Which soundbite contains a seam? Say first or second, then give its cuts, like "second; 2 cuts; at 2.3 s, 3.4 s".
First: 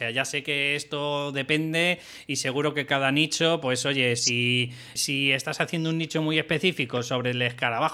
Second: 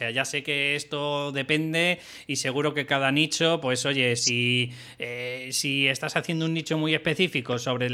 first; 1 cut; at 5.0 s